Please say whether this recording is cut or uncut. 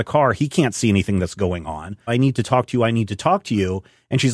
cut